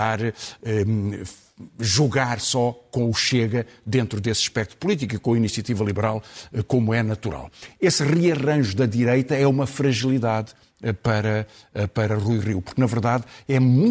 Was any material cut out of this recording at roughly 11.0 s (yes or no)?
no